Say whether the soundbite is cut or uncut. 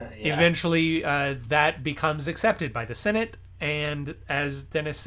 uncut